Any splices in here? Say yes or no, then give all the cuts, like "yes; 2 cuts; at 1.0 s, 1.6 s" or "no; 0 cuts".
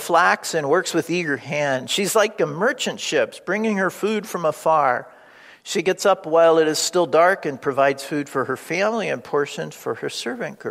no; 0 cuts